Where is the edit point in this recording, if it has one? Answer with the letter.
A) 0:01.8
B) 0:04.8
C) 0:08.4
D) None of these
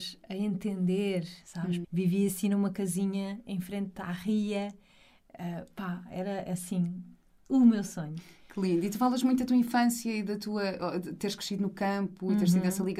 A